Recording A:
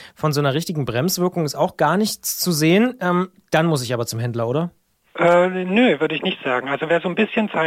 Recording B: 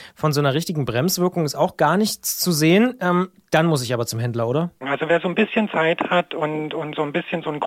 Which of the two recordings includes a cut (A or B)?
B